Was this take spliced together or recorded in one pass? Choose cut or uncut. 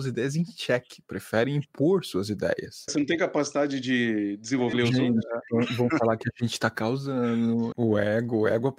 cut